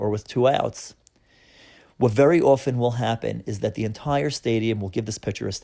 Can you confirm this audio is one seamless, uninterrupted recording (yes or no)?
yes